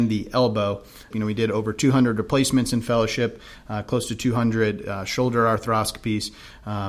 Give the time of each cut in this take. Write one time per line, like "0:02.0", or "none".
0:01.1